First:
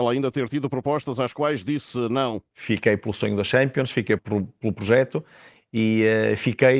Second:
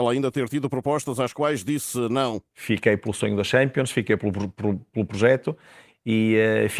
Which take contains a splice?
first; 1 cut; at 4.2 s

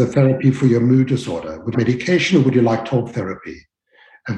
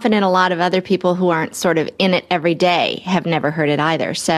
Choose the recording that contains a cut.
first; 1 cut; at 1.7 s

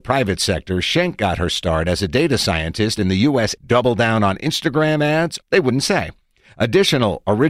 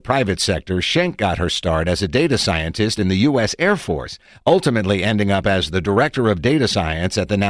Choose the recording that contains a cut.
first; 2 cuts; at 3.6 s, 5.4 s

